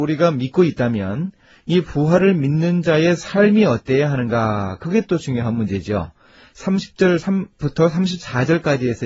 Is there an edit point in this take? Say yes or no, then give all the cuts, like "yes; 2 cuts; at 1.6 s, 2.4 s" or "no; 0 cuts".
no; 0 cuts